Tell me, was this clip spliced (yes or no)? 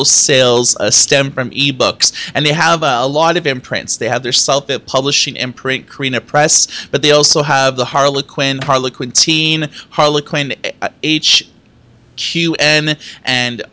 yes